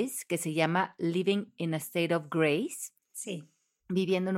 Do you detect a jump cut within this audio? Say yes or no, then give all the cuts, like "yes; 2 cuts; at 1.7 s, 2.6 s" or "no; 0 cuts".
no; 0 cuts